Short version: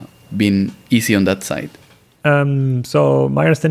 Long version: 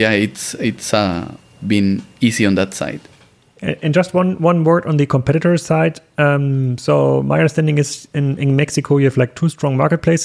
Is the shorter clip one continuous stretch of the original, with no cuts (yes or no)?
no